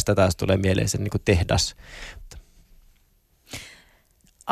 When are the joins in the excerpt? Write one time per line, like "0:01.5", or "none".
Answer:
0:02.2